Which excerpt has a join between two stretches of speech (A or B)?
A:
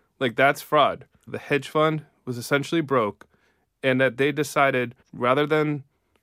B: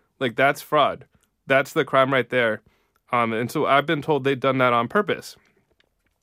A